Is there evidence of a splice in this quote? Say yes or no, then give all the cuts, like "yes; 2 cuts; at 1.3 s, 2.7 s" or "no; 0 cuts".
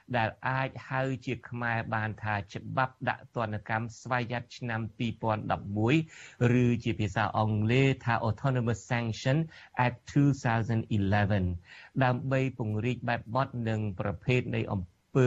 no; 0 cuts